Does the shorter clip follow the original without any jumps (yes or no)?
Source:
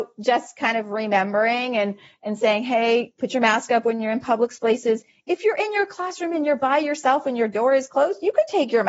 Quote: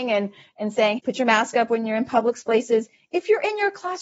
no